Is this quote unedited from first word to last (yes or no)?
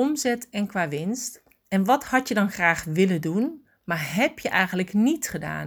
yes